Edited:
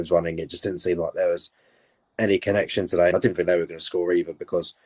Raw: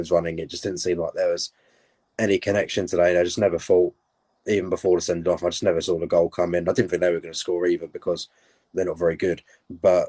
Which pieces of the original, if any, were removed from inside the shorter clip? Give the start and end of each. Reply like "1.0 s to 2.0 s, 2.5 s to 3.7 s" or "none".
3.1 s to 6.6 s